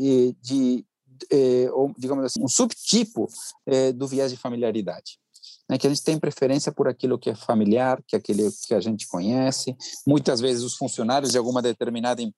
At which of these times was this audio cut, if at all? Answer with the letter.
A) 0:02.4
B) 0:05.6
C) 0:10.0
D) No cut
A